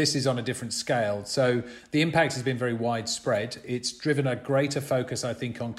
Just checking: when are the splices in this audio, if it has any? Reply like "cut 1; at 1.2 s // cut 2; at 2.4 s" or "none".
none